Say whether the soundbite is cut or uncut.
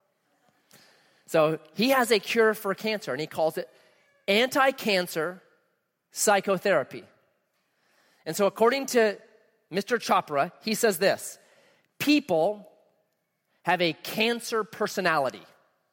uncut